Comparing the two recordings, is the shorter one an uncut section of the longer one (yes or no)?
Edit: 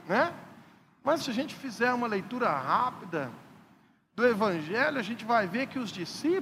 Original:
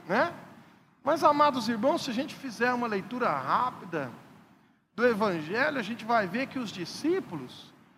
no